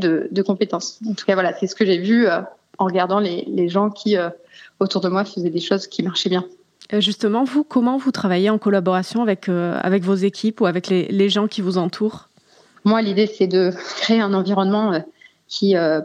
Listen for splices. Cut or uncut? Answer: uncut